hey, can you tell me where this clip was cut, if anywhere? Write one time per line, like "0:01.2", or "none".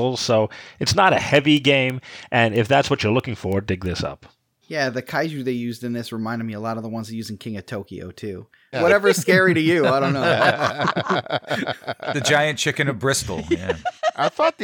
0:04.6
0:08.7